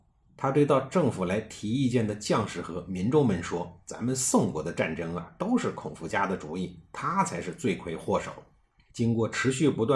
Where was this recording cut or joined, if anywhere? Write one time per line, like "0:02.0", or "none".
none